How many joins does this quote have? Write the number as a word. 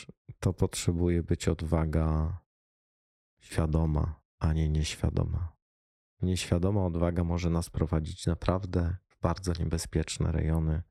zero